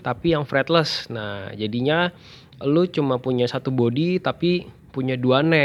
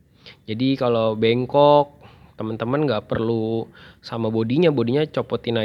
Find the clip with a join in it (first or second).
first